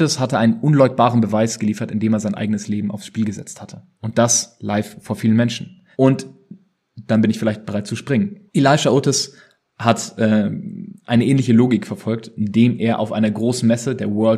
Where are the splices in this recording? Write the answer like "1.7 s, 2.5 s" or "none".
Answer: 4.0 s, 5.9 s, 8.5 s

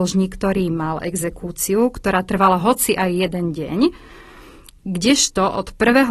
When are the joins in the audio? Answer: none

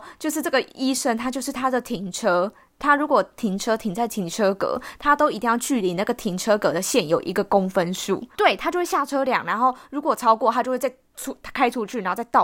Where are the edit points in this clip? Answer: 8.4 s

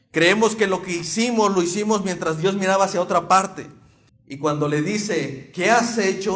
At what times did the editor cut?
4.1 s

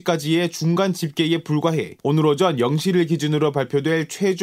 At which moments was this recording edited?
none

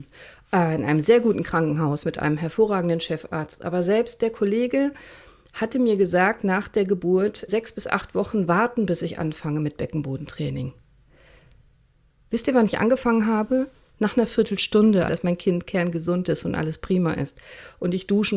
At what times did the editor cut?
7.5 s, 15.1 s

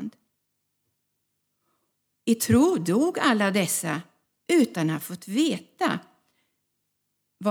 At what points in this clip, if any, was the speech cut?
2.0 s

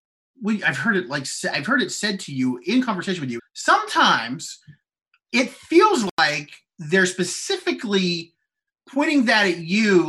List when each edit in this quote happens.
3.4 s

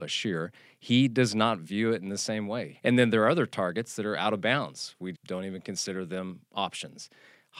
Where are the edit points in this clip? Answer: 2.7 s, 5.1 s

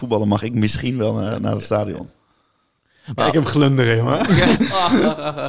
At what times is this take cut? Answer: 4.6 s

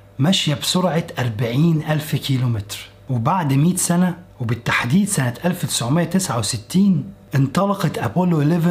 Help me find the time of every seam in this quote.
4.3 s

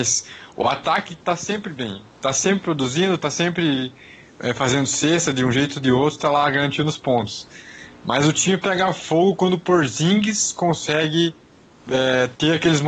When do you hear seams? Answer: none

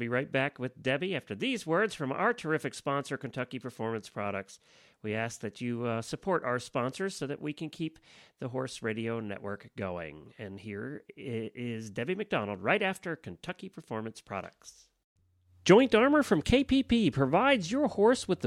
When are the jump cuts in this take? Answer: none

